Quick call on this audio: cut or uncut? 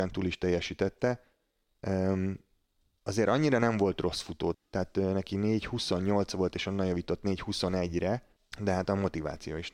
cut